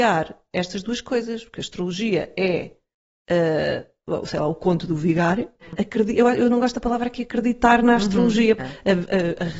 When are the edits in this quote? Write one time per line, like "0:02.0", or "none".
0:05.7
0:08.6